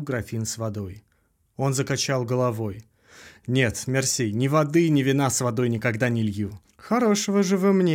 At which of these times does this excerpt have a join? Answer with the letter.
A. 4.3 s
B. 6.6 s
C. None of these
B